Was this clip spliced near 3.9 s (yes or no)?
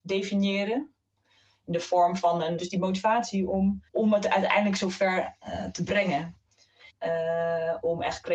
yes